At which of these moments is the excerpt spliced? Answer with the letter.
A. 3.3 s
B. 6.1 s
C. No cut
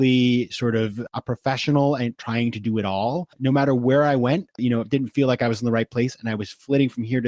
A